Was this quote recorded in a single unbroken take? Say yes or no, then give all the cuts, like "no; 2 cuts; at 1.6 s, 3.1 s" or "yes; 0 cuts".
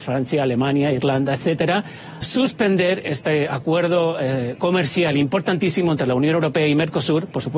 no; 1 cut; at 2.2 s